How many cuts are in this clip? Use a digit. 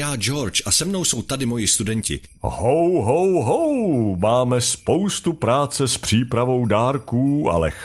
1